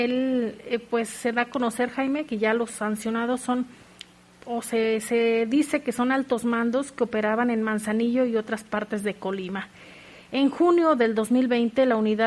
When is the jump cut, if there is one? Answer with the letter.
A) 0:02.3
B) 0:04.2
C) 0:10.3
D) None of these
D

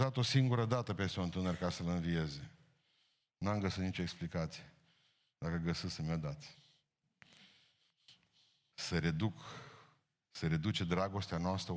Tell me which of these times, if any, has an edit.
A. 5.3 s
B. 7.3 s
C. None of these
C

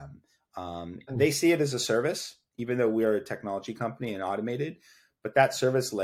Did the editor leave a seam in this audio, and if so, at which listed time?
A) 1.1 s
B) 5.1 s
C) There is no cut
A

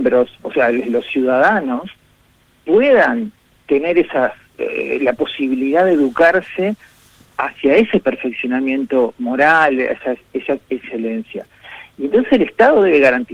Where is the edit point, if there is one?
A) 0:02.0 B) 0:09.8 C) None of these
C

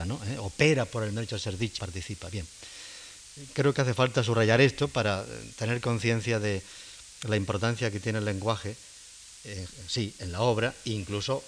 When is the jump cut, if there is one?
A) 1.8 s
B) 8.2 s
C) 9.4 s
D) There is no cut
A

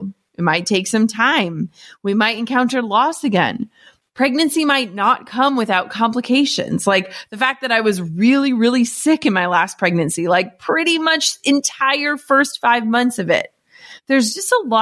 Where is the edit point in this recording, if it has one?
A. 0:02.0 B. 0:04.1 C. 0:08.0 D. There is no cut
D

